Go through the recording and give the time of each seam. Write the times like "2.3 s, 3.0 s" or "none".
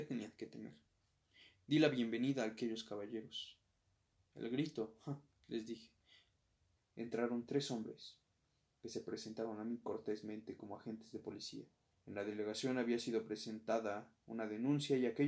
6.8 s, 11.9 s